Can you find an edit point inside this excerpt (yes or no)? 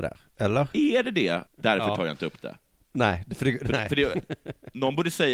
yes